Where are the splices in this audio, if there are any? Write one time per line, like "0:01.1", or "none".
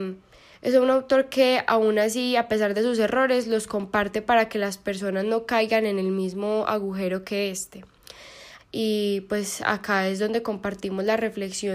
0:08.6